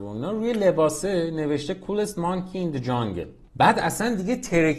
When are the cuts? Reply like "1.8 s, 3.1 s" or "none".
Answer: 3.5 s